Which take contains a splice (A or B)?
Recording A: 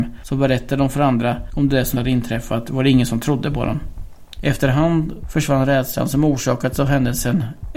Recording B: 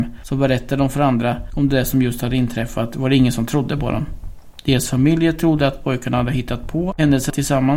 A